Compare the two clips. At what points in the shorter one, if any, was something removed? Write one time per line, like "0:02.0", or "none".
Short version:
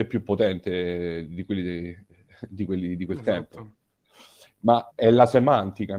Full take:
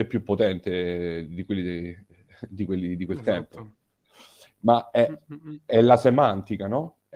0:04.9